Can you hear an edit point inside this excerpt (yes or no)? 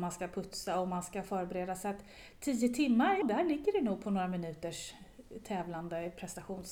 yes